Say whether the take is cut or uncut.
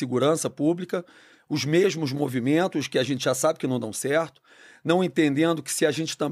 uncut